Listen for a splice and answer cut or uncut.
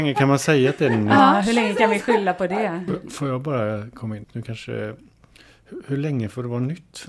cut